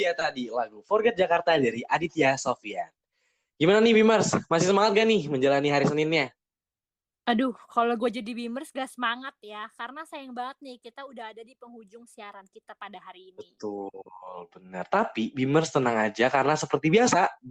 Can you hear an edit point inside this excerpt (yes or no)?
no